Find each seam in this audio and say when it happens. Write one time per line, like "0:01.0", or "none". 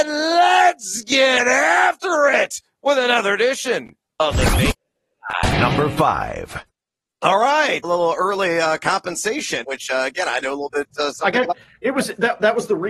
0:07.8
0:09.6